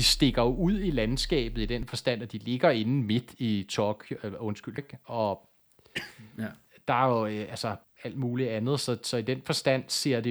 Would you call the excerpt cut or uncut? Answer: cut